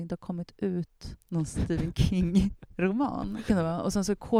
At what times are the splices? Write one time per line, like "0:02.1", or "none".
0:01.2
0:03.5